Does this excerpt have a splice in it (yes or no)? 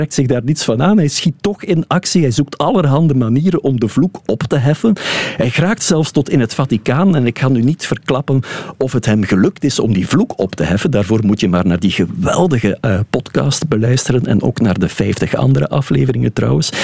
no